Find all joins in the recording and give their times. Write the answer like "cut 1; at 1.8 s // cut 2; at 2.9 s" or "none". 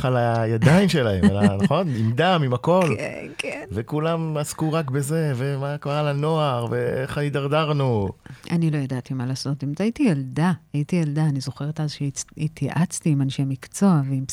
cut 1; at 8.4 s